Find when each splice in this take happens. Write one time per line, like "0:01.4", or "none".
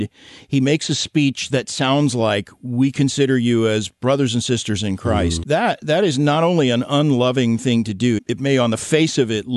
0:05.4
0:08.2